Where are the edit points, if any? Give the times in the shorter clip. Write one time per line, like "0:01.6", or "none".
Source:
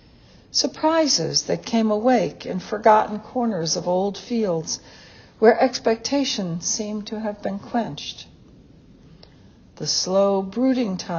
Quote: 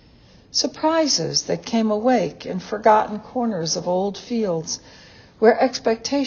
none